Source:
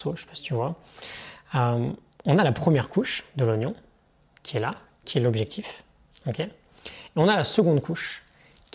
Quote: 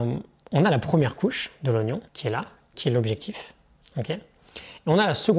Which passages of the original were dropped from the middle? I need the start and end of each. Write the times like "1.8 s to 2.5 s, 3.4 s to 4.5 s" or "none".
3.8 s to 4.4 s